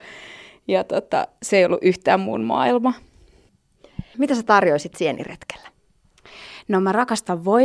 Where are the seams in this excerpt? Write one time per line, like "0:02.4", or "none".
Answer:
0:04.1